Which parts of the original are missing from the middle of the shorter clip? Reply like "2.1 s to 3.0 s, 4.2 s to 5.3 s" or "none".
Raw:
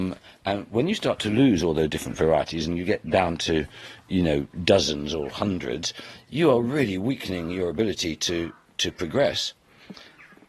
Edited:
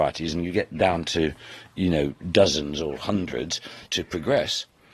6.2 s to 8.7 s